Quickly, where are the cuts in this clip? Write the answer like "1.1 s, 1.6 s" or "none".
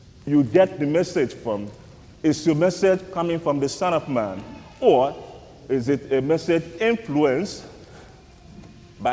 none